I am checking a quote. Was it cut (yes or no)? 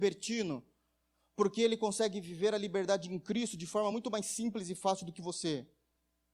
no